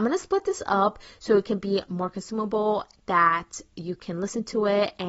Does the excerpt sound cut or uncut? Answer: uncut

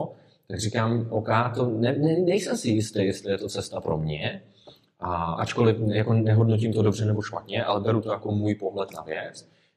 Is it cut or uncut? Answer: uncut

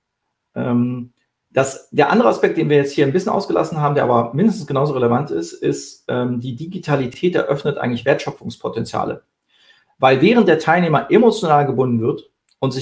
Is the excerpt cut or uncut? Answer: uncut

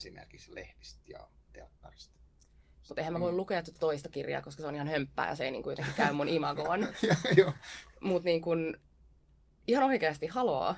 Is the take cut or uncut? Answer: cut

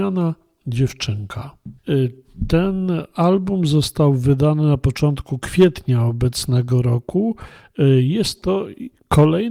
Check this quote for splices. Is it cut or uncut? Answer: cut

